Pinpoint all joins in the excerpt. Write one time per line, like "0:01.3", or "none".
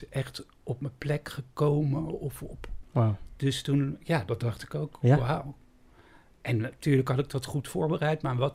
0:02.8